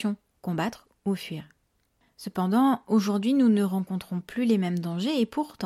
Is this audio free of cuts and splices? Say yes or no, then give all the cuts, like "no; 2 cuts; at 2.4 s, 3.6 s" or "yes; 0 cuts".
no; 1 cut; at 2.0 s